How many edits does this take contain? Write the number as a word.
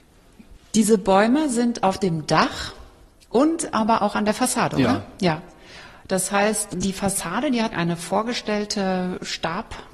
zero